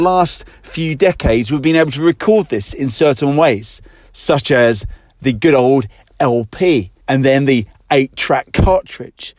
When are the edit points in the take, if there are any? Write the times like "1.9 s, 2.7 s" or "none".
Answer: 7.0 s